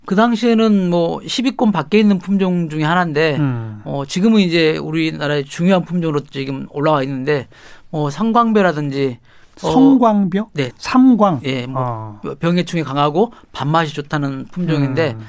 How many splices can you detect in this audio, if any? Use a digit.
1